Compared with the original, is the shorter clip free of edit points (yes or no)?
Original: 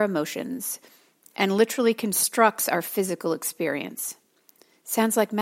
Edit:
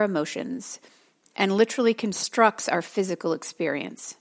yes